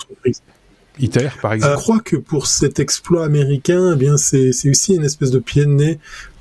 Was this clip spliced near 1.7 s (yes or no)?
yes